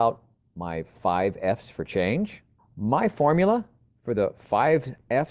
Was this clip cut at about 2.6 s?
yes; 1 cut; at 2.6 s

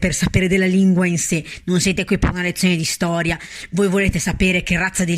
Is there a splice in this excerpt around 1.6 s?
no; 0 cuts

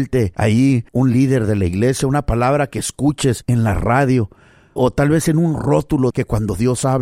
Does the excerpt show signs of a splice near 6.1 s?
yes; 2 cuts; at 4.8 s, 6.1 s

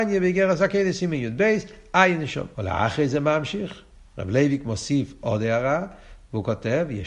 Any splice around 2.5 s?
yes; 1 cut; at 2.5 s

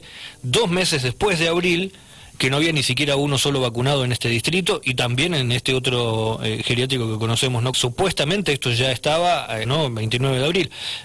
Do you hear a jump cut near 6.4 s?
no; 2 cuts; at 7.7 s, 9.6 s

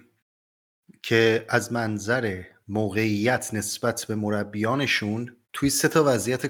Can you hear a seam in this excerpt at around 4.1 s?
no; 1 cut; at 5.4 s

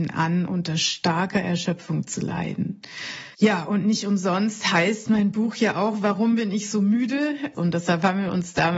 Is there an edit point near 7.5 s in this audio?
yes; 2 cuts; at 3.3 s, 7.5 s

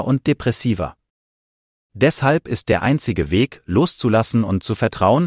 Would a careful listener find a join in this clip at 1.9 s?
no; 0 cuts

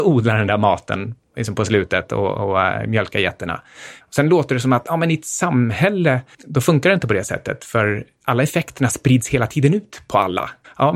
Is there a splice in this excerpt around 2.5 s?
no; 1 cut; at 4.0 s

